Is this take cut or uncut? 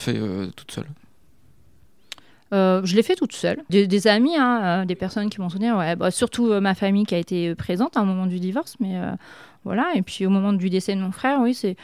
cut